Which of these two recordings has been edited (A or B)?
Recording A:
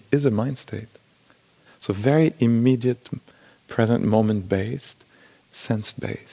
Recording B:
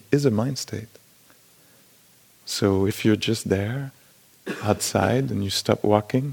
A